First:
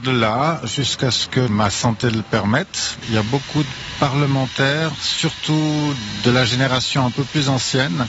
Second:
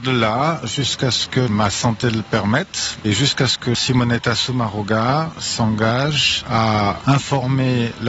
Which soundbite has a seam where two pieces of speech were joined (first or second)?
first